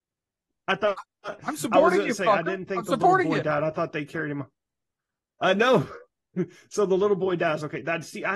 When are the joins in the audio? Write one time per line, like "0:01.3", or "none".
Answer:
none

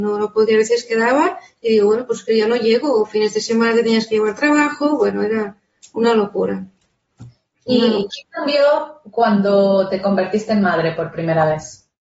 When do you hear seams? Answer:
none

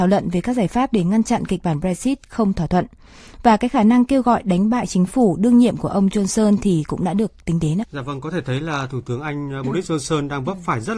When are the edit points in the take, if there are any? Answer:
0:07.8

